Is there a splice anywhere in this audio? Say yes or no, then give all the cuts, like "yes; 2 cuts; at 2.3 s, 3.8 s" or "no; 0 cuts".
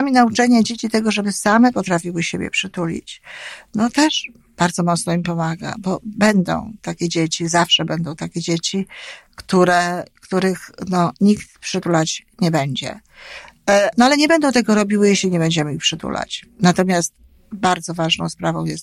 yes; 1 cut; at 13.9 s